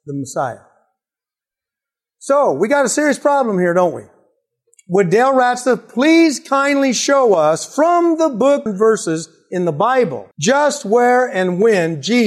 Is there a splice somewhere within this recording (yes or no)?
yes